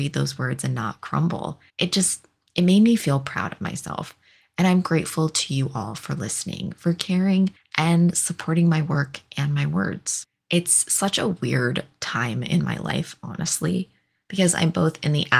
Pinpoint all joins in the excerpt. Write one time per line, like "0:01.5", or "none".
0:01.7